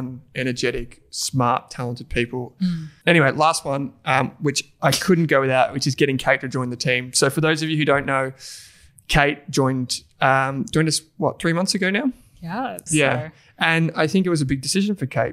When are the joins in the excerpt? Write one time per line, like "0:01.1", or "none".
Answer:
0:03.0
0:12.9